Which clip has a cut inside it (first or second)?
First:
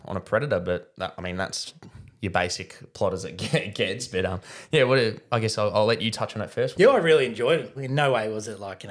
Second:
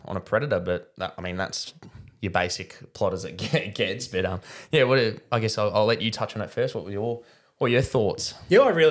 first